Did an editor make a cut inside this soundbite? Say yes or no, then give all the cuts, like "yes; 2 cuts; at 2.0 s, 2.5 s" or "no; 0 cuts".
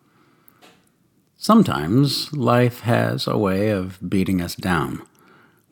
no; 0 cuts